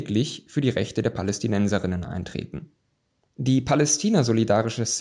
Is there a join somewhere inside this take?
yes; 1 cut; at 3.3 s

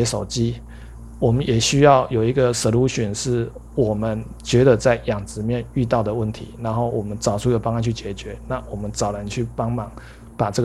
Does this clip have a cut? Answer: no; 0 cuts

